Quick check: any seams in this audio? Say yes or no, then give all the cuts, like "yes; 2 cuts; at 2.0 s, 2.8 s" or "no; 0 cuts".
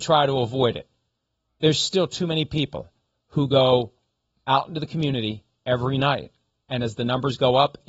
no; 0 cuts